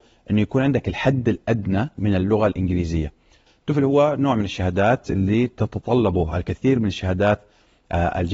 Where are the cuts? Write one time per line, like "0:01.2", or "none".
0:03.5